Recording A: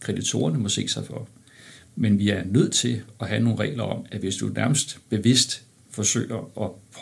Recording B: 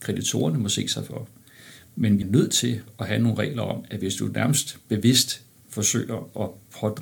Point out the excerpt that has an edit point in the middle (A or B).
B